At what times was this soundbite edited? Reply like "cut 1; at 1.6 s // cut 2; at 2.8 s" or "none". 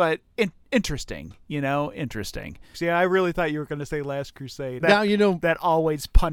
cut 1; at 2.7 s // cut 2; at 4.8 s